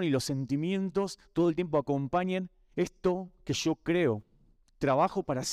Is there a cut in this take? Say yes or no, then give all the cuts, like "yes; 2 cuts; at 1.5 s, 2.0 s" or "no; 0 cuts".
no; 0 cuts